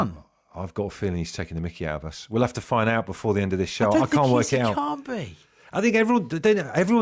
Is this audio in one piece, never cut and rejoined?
yes; 0 cuts

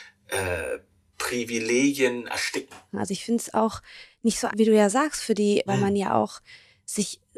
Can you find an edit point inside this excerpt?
yes; 2 cuts; at 4.5 s, 5.7 s

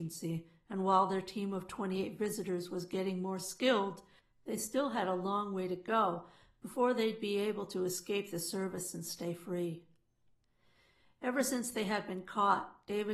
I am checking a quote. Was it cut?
no; 0 cuts

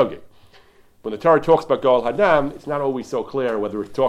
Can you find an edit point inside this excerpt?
no; 0 cuts

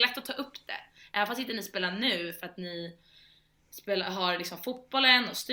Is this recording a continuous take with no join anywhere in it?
yes; 0 cuts

